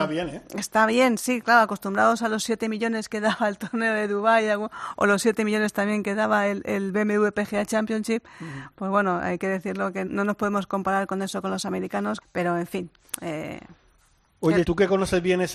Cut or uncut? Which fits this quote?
cut